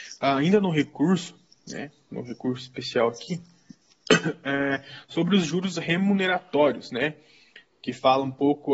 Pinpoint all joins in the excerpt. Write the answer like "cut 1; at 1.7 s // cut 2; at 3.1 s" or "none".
none